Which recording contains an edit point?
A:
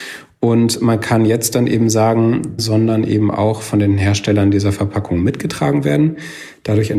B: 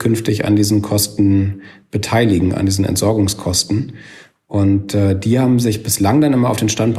A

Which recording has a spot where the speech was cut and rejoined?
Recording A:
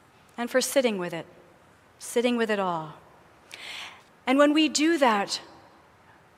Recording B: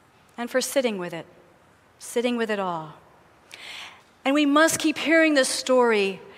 A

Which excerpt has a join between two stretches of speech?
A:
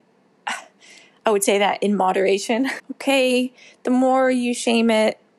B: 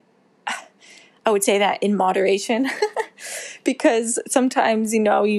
A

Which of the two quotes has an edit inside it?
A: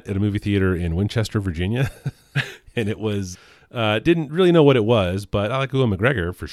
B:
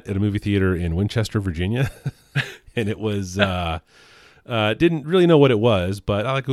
A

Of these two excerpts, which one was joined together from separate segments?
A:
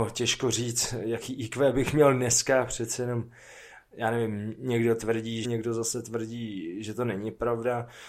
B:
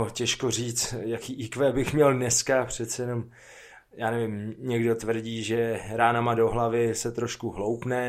A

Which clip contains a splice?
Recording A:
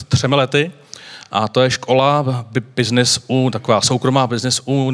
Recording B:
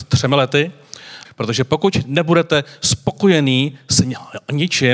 B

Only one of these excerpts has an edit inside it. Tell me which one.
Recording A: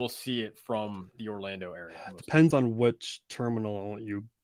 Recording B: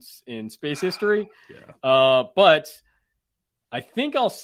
A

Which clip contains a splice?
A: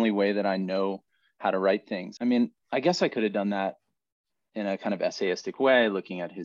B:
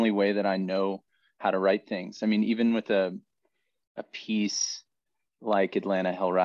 A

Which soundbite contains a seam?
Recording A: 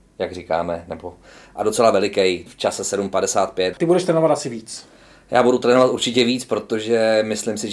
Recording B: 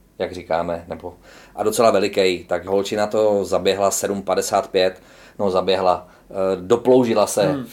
A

